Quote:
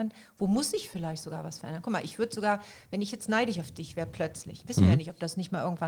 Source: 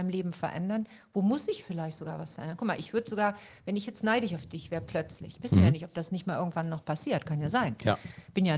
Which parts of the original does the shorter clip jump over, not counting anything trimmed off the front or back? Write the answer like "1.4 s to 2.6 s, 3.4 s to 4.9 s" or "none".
none